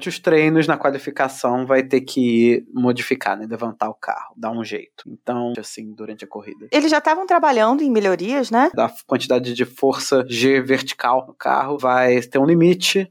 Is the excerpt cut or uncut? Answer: cut